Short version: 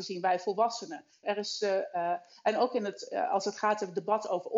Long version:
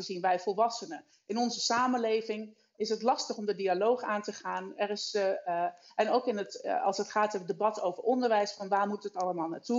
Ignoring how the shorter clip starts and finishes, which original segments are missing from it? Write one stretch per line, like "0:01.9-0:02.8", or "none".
0:01.2-0:04.8